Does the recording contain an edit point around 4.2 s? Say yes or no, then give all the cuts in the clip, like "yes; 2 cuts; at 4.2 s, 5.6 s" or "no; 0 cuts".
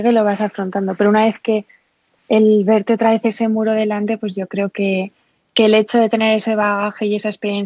no; 1 cut; at 2.1 s